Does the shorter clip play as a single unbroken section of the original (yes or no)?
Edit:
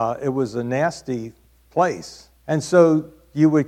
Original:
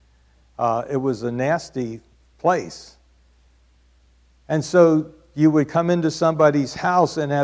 no